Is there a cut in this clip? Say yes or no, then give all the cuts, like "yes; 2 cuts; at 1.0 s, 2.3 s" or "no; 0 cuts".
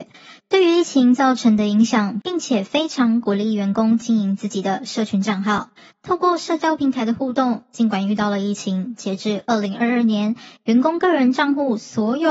yes; 1 cut; at 2.2 s